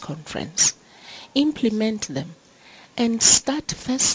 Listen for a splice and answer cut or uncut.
uncut